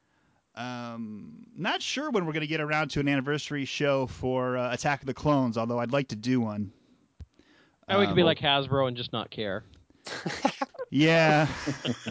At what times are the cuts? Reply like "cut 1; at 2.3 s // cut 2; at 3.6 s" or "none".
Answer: none